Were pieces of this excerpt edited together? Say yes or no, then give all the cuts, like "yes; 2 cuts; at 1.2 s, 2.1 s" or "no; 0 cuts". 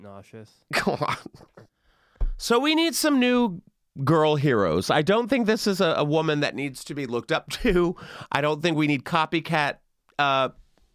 yes; 1 cut; at 1.7 s